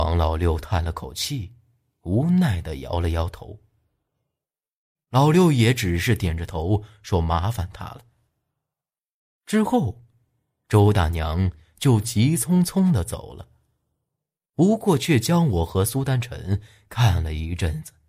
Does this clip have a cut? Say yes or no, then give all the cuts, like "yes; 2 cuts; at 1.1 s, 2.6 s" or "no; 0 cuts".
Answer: yes; 1 cut; at 4.9 s